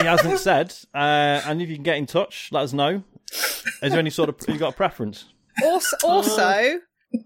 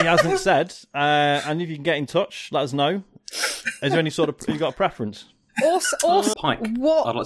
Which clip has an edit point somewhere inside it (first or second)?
second